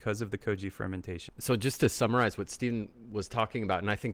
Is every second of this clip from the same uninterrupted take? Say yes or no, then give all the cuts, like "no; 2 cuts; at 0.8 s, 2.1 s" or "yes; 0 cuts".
no; 1 cut; at 1.3 s